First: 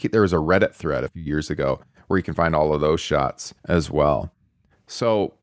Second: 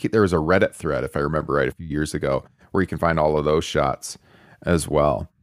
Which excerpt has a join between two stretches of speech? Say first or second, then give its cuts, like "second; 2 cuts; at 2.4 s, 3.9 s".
first; 2 cuts; at 1.1 s, 3.6 s